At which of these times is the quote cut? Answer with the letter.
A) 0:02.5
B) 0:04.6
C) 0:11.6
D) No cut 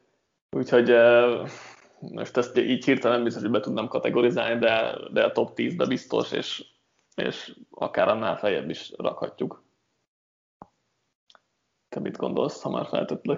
A